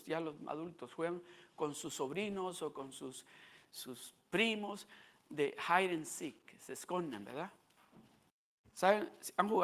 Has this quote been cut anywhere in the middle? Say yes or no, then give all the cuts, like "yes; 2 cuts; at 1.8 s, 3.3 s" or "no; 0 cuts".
no; 0 cuts